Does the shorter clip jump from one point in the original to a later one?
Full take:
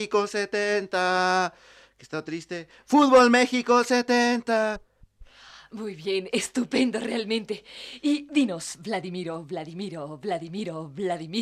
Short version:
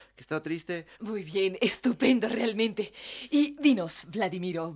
yes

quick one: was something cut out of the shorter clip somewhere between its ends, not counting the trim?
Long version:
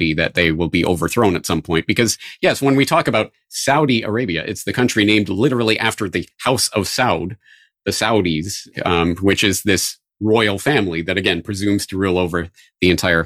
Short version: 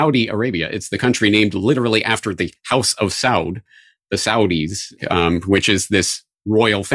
no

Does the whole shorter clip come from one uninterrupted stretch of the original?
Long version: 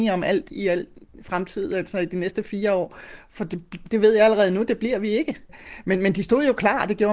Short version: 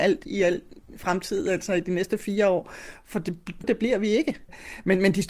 no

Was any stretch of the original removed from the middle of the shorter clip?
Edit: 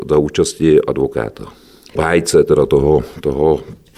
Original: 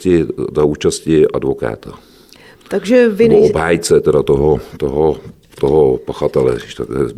yes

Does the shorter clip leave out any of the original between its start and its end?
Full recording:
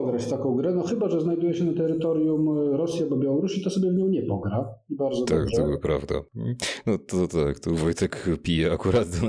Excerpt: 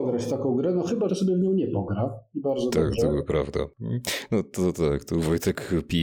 yes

